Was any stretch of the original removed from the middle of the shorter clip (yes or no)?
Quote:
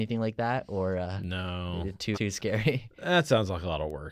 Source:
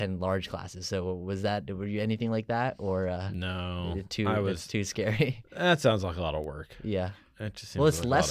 yes